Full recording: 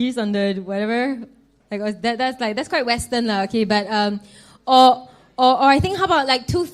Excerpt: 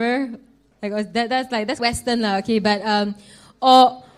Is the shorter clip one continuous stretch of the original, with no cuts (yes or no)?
no